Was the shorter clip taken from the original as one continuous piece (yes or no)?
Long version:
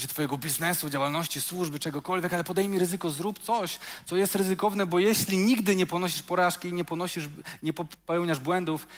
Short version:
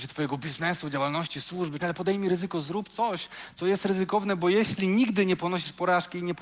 no